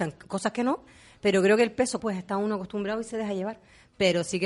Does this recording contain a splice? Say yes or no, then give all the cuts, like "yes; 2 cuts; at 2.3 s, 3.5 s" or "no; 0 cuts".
yes; 1 cut; at 2.0 s